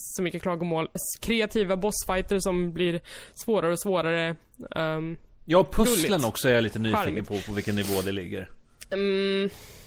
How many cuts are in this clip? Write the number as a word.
one